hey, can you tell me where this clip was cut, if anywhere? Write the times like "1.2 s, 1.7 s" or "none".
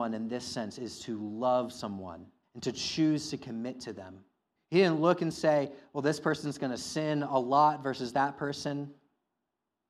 2.4 s, 4.6 s